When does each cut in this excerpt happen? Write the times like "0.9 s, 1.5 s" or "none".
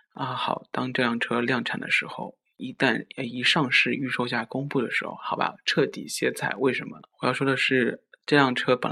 7.0 s

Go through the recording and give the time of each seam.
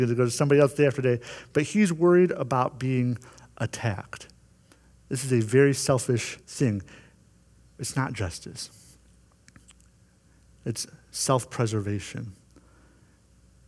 6.4 s

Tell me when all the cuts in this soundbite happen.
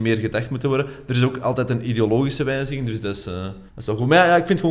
3.7 s

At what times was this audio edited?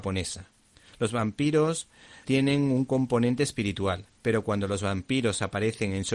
2.2 s

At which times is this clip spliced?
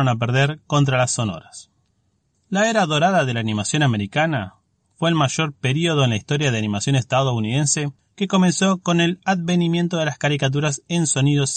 none

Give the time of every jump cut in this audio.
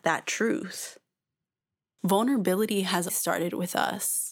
2.0 s, 3.1 s

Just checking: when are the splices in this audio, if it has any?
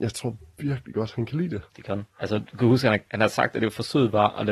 2.1 s

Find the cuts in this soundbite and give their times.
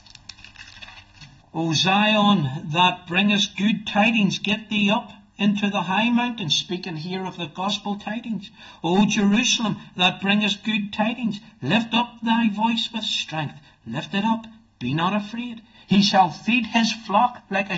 1.4 s, 15.8 s

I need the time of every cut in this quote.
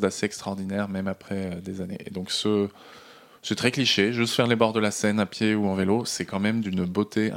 none

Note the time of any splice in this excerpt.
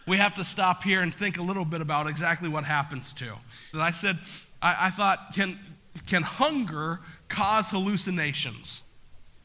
3.7 s

